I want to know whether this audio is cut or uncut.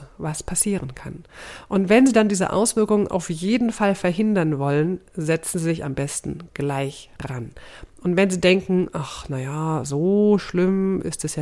uncut